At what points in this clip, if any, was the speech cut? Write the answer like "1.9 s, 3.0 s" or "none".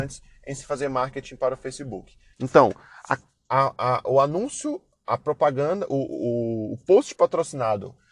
2.3 s